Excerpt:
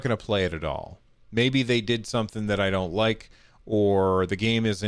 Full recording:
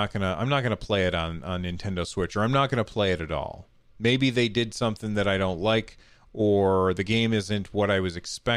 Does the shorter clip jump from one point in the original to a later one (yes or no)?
no